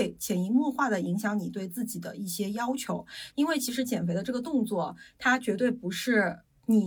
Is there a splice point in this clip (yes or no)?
yes